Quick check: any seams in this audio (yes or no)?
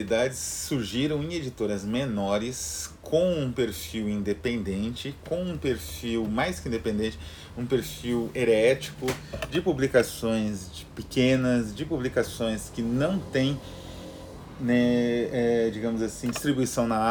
no